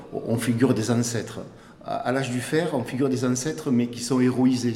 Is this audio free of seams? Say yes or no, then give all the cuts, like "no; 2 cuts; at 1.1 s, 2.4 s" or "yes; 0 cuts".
yes; 0 cuts